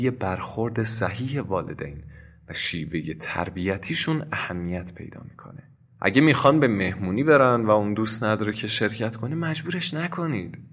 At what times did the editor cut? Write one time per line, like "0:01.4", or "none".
0:05.9